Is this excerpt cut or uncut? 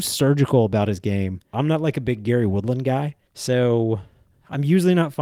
cut